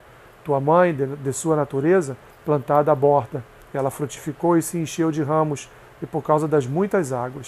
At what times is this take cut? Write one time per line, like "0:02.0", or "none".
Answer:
0:02.3